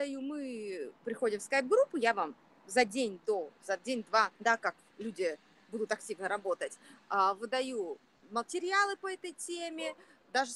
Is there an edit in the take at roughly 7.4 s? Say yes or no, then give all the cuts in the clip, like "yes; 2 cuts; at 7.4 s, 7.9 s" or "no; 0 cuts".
no; 1 cut; at 4.3 s